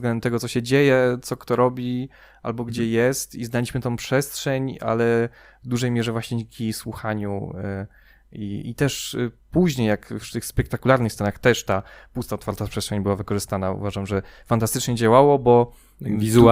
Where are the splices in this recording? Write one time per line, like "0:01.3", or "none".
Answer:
none